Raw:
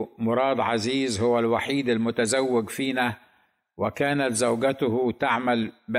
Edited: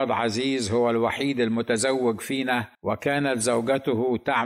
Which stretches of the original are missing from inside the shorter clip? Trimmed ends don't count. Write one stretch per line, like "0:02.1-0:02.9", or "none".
0:03.2-0:03.7